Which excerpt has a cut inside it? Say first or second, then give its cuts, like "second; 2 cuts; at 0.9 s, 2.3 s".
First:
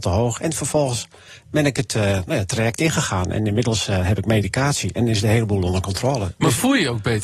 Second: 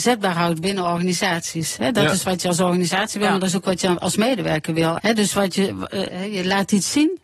second; 2 cuts; at 5.0 s, 6.1 s